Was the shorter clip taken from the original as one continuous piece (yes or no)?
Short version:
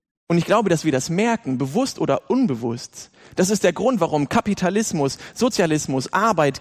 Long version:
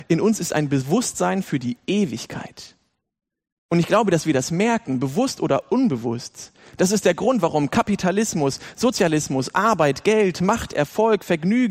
yes